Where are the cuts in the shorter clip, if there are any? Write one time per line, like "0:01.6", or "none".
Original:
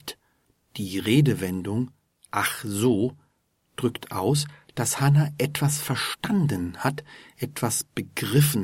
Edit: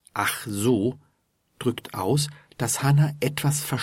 none